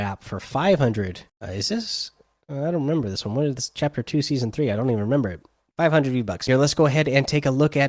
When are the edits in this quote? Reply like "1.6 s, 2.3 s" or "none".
1.3 s, 6.5 s